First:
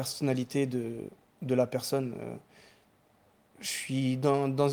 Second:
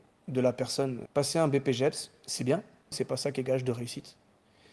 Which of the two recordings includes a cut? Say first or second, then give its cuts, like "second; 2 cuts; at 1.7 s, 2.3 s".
second; 2 cuts; at 1.1 s, 2.9 s